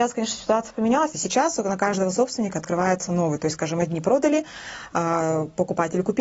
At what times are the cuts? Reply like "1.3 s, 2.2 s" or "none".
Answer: 1.1 s